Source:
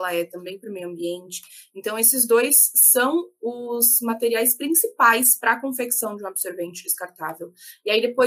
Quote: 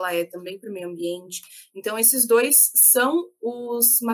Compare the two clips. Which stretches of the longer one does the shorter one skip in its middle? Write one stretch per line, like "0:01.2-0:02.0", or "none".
none